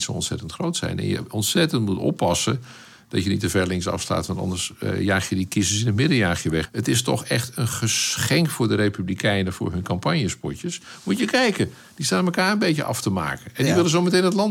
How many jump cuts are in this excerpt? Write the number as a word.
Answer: one